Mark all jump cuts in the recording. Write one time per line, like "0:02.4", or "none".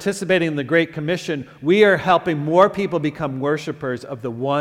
none